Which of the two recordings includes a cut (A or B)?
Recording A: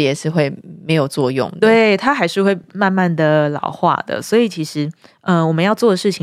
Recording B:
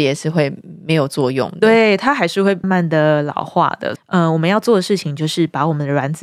B